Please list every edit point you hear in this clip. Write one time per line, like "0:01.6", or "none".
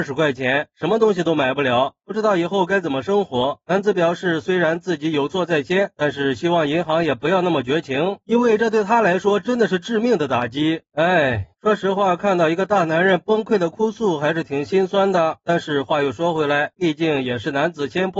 0:11.5
0:16.7